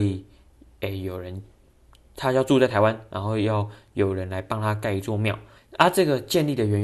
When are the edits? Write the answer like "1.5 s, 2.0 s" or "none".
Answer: 5.6 s

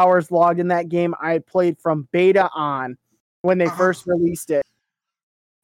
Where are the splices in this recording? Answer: none

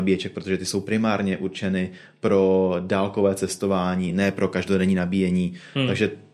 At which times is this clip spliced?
none

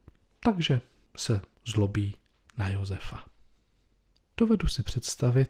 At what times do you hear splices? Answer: 4.2 s

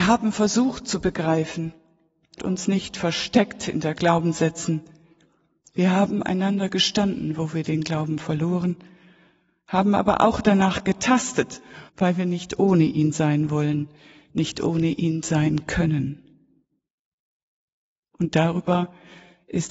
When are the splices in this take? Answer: 2.4 s, 11.9 s

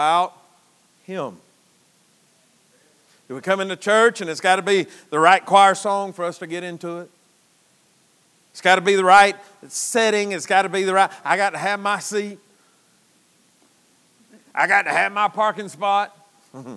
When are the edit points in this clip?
none

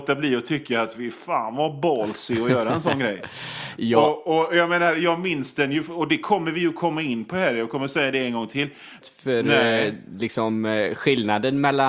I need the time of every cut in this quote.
9.0 s

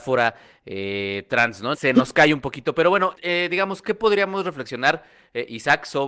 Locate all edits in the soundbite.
1.7 s, 3.1 s

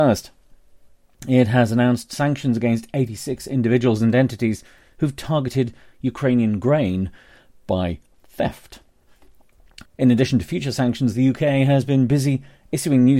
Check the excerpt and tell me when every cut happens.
9.9 s

